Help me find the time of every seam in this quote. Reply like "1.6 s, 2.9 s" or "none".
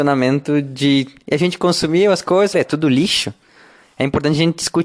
2.5 s